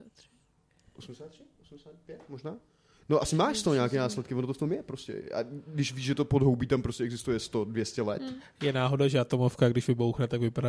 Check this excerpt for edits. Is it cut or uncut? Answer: uncut